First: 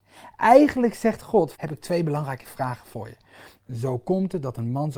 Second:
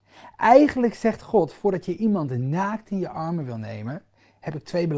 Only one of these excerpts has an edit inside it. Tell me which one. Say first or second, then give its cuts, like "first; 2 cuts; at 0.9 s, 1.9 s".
first; 2 cuts; at 1.5 s, 3.6 s